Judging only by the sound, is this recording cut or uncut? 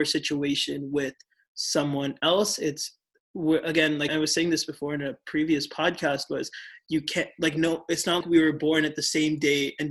cut